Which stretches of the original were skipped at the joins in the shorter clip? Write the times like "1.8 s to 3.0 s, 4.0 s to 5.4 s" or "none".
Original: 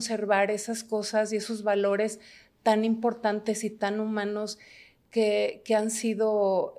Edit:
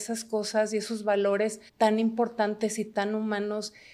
2.3 s to 2.5 s